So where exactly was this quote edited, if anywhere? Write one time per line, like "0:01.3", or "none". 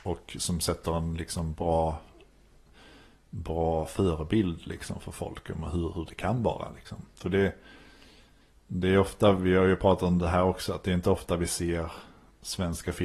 none